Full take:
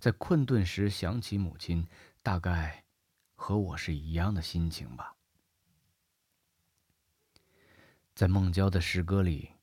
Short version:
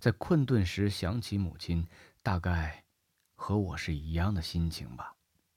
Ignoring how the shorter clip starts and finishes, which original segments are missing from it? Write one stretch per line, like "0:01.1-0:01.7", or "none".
none